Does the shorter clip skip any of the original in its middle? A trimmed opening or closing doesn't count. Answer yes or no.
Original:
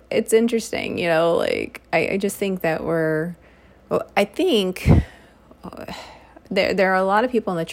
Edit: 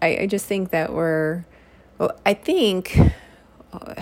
no